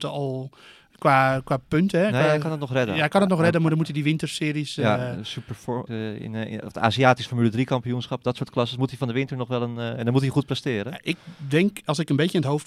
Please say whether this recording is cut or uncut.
cut